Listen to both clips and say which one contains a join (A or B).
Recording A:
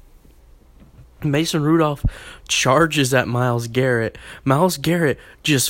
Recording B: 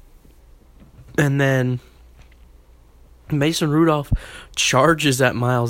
A